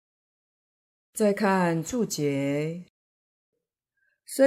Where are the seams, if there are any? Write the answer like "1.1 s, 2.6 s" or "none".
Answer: none